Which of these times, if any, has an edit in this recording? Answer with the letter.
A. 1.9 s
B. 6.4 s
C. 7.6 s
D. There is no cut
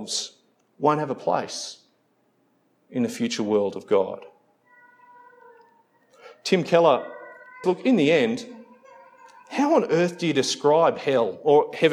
C